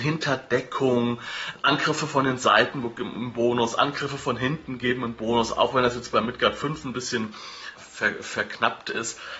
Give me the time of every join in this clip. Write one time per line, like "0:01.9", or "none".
0:01.5
0:07.8